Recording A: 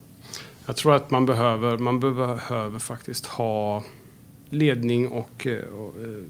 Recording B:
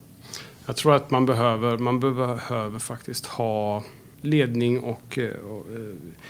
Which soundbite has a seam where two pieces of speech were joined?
B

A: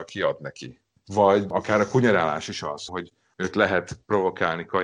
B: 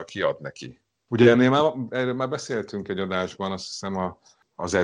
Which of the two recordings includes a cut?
A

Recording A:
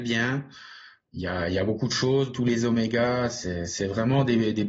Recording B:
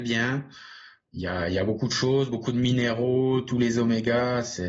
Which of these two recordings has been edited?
A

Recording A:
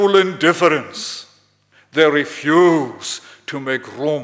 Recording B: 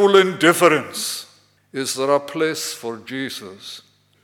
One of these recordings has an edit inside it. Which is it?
B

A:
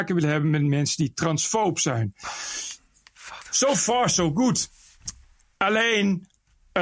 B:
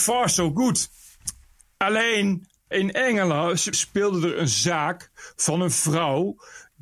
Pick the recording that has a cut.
B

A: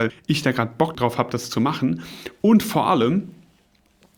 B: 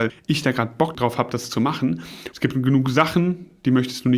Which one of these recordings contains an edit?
B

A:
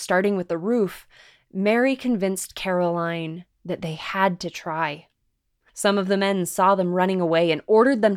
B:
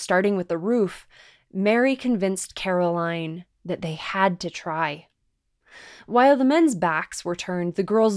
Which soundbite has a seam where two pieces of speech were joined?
A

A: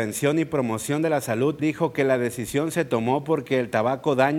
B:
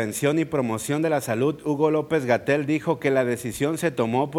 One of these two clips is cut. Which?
A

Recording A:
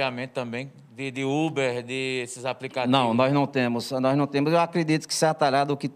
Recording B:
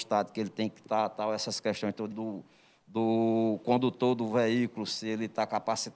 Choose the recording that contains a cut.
B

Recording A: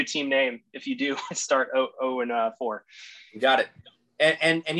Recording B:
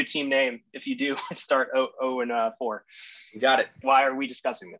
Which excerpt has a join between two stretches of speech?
B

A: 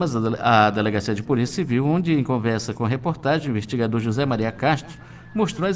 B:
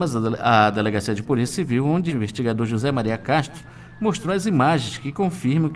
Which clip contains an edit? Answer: B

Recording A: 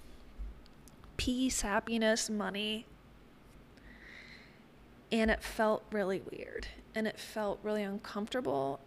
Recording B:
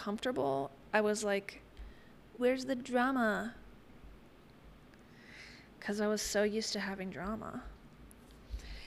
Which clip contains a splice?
B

